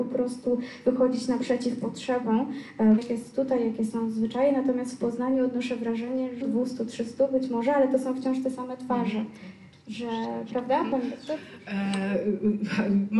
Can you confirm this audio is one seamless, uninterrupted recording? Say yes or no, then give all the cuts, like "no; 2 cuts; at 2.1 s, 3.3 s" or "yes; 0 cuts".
no; 2 cuts; at 3.0 s, 6.4 s